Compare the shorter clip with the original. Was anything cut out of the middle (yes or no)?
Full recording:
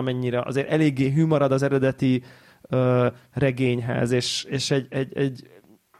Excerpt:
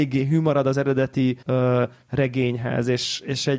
yes